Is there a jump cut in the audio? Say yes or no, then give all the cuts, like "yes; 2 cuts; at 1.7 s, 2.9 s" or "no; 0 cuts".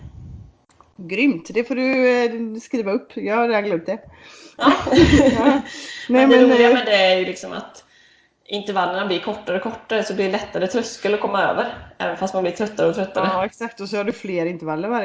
no; 0 cuts